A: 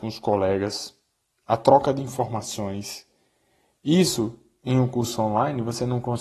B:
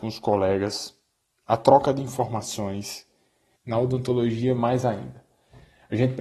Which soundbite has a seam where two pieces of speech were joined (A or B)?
B